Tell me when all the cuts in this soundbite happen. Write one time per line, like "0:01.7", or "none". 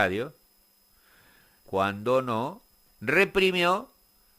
0:01.6